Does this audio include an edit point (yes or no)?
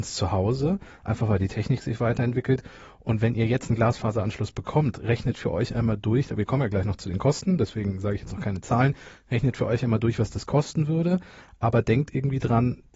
no